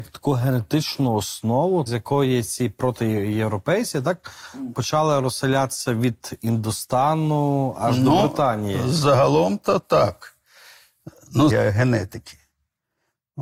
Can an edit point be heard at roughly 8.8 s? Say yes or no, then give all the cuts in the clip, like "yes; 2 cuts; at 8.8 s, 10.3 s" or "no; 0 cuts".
no; 3 cuts; at 1.9 s, 4.7 s, 11.5 s